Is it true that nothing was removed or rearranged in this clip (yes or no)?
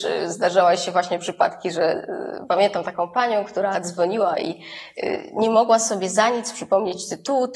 yes